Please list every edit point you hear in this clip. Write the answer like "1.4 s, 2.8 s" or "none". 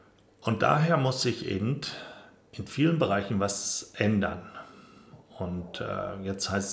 none